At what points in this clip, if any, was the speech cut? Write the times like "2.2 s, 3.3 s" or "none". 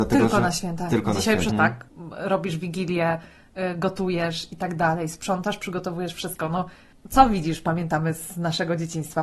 1.5 s